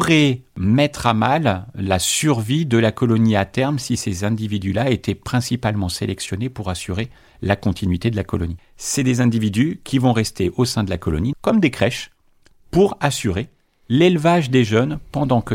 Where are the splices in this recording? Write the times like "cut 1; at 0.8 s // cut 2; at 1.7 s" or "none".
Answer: cut 1; at 8.6 s // cut 2; at 11.3 s